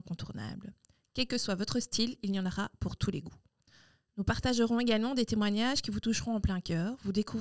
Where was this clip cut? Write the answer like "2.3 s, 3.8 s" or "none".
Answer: none